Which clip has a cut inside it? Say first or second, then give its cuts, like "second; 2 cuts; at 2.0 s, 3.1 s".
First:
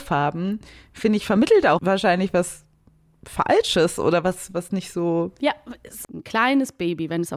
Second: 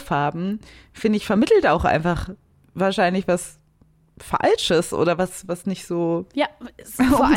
first; 2 cuts; at 1.8 s, 6.0 s